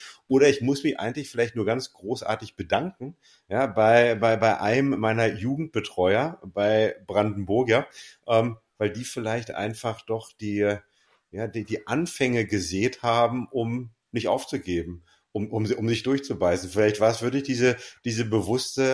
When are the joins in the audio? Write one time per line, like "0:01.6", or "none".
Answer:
none